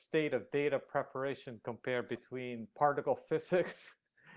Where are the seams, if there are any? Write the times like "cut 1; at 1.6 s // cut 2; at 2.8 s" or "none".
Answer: none